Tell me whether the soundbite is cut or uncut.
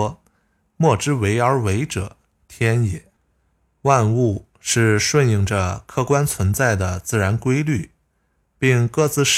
cut